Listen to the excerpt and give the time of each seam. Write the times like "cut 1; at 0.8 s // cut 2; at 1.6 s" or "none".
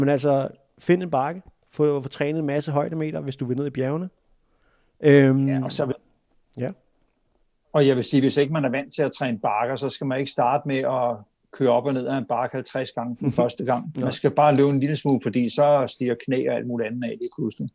none